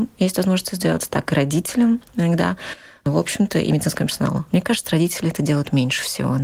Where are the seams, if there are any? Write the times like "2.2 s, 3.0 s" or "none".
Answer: none